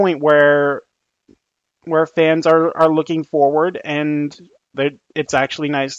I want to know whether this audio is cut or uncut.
cut